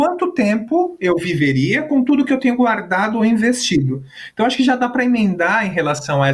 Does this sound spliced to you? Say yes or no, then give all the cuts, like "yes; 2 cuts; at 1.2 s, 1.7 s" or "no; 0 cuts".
no; 0 cuts